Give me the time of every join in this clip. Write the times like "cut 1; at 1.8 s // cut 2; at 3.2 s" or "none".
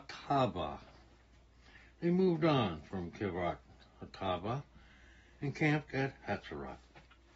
none